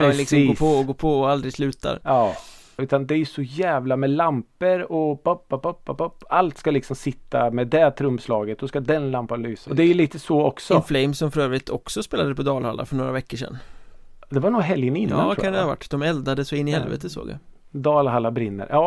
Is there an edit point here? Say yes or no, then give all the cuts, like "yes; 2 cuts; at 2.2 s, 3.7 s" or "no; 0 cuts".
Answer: yes; 2 cuts; at 2.8 s, 9.7 s